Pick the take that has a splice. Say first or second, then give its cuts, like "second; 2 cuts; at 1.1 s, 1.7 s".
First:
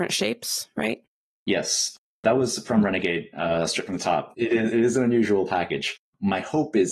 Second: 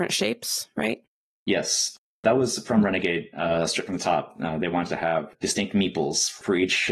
first; 1 cut; at 4.3 s